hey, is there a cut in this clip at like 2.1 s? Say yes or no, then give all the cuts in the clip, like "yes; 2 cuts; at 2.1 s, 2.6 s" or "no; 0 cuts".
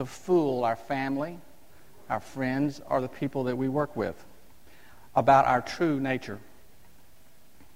no; 0 cuts